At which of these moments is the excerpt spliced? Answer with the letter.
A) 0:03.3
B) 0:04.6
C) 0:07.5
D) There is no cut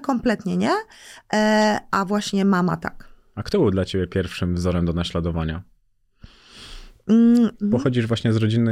C